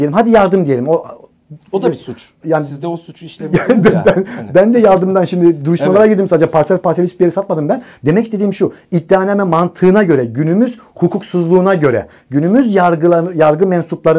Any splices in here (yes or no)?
no